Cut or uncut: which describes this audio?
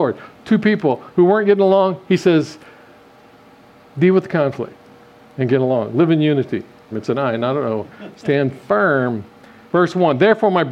cut